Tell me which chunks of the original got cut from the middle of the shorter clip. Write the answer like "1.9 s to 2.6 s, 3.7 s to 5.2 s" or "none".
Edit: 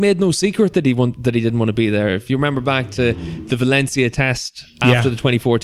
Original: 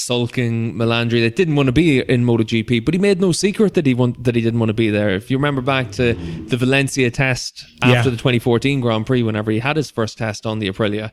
none